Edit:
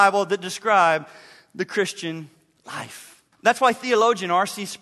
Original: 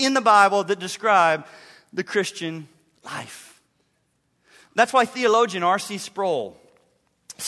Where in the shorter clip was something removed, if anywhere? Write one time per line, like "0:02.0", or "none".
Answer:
0:03.3